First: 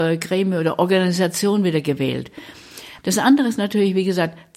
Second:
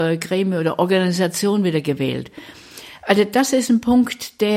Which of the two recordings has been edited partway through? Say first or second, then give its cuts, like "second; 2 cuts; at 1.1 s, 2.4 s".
first; 1 cut; at 3.0 s